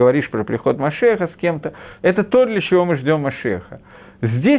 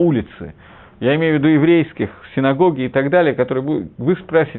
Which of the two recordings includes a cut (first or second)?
first